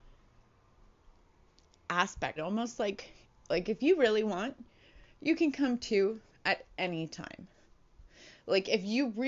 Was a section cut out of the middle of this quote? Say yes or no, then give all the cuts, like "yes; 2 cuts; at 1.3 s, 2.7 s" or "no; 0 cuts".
yes; 1 cut; at 2.4 s